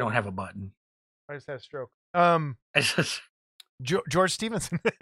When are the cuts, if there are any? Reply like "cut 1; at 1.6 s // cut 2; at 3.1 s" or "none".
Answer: cut 1; at 2.6 s